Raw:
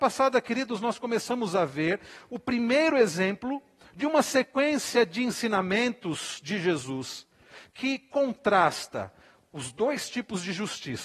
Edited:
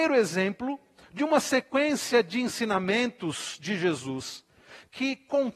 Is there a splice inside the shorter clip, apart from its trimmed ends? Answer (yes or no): no